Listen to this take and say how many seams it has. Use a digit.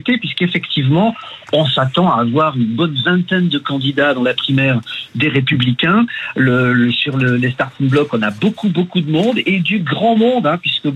0